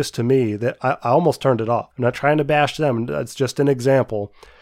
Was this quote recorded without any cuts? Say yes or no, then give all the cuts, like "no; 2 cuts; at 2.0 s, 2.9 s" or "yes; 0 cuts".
no; 1 cut; at 1.9 s